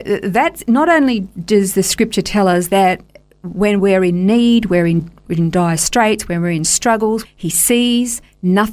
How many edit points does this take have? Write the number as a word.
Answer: one